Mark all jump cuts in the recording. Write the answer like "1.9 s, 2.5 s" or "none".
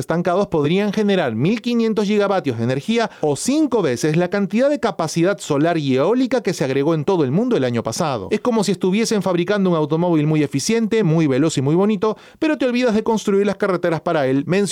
none